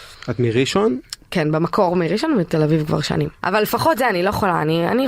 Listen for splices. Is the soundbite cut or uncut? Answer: cut